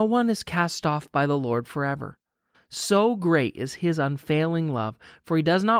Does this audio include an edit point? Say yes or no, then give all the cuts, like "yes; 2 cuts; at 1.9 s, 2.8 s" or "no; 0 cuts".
yes; 1 cut; at 2.5 s